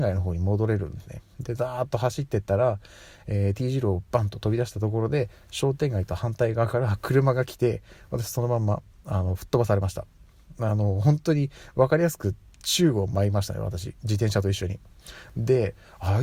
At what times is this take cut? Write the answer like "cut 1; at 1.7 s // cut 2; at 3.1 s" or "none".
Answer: none